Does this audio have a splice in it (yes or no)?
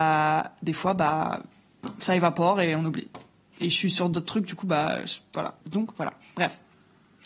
yes